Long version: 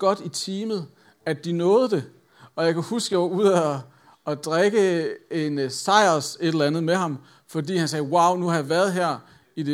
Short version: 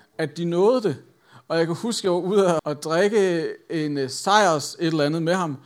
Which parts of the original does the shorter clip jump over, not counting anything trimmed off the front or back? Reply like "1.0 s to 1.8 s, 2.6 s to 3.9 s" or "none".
3.7 s to 4.2 s